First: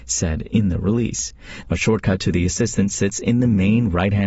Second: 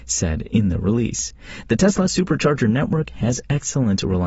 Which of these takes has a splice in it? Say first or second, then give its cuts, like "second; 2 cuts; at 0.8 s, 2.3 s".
first; 1 cut; at 1.6 s